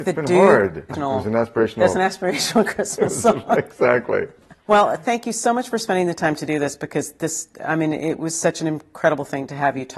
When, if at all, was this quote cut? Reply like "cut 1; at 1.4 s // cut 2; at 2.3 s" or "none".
cut 1; at 0.9 s